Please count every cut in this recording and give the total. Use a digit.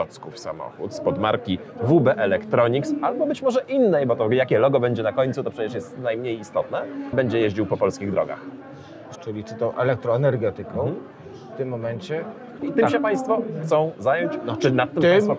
3